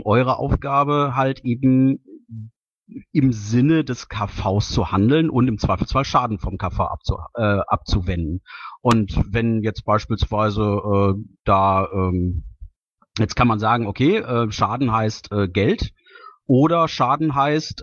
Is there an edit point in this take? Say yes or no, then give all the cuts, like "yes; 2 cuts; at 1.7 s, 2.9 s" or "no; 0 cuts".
no; 0 cuts